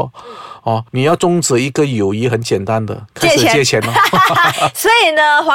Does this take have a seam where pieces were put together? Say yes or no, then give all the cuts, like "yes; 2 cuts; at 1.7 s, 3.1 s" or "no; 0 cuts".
yes; 1 cut; at 4.5 s